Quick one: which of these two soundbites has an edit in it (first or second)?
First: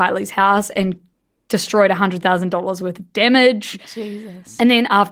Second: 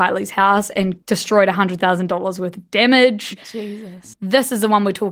second